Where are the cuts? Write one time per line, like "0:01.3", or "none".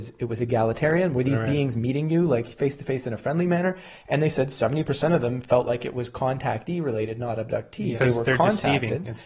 0:08.0